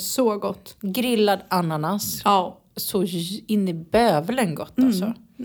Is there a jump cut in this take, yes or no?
no